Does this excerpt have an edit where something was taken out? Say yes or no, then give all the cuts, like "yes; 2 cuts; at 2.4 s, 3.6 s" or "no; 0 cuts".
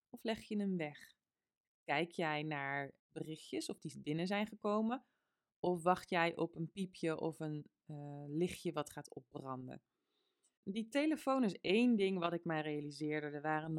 no; 0 cuts